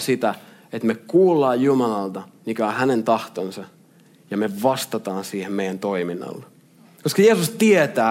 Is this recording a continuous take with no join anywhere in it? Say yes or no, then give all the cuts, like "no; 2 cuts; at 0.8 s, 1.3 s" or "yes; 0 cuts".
no; 1 cut; at 6.8 s